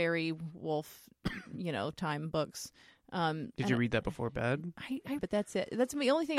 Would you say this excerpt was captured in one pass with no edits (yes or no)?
no